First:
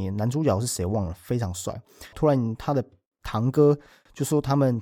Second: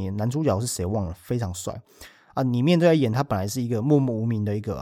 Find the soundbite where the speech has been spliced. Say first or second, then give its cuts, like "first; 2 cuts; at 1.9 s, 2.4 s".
first; 1 cut; at 2.1 s